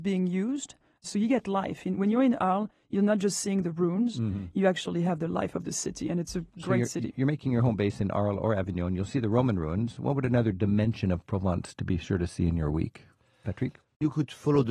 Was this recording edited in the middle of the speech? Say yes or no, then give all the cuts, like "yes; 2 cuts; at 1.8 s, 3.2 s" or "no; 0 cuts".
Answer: no; 0 cuts